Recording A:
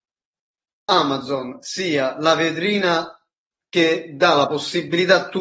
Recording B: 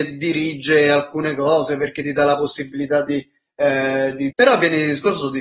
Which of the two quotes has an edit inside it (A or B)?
B